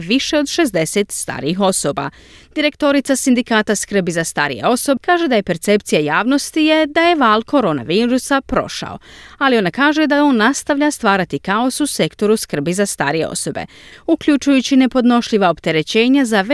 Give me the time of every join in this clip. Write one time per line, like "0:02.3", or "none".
0:05.0
0:13.9